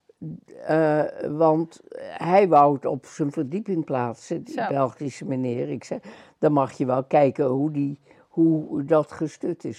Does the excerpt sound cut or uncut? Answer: uncut